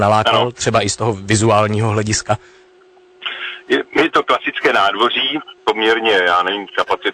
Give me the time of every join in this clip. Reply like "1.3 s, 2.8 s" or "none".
none